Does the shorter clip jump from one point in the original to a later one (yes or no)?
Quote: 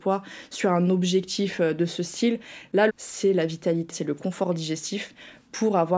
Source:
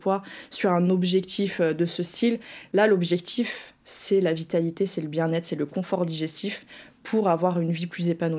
yes